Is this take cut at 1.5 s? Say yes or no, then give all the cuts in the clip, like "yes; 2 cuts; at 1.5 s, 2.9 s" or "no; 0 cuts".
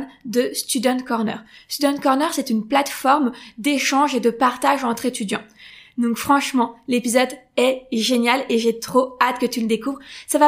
no; 0 cuts